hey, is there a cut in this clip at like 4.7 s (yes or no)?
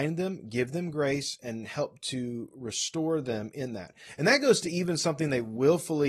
no